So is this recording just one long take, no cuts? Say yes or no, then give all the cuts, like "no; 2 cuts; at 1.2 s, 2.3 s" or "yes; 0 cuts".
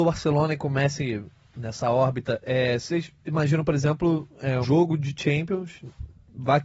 no; 1 cut; at 4.6 s